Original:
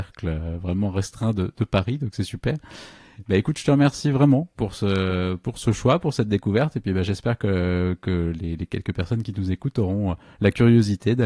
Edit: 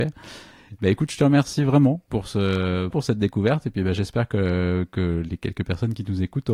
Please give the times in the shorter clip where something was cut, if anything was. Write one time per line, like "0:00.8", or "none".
0:02.9
0:05.3